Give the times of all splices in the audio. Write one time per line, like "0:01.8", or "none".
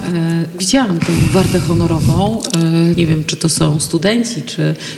0:02.9